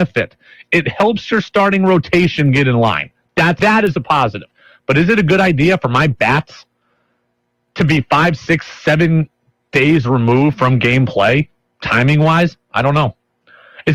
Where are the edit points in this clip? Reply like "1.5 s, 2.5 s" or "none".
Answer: 3.6 s

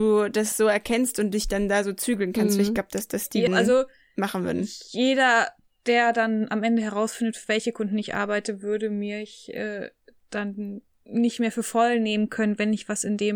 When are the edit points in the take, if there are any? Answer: 3.5 s

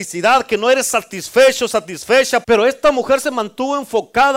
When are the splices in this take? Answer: 2.4 s

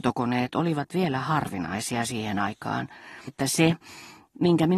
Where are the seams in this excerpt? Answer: 3.3 s

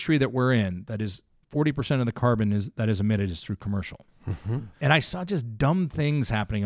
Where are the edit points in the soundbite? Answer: 4.7 s

